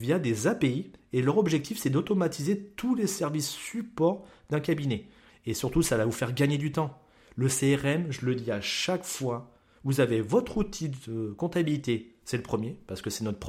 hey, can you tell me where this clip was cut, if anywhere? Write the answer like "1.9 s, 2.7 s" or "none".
5.3 s